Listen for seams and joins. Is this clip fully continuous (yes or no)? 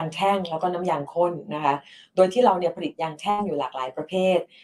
yes